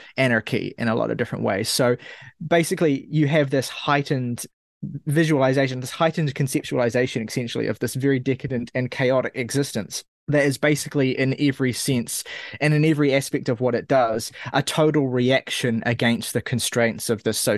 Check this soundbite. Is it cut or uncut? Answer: uncut